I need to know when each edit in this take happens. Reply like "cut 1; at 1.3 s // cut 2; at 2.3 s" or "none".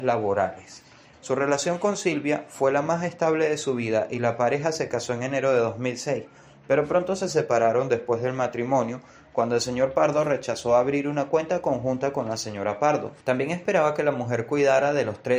cut 1; at 1.1 s // cut 2; at 13.2 s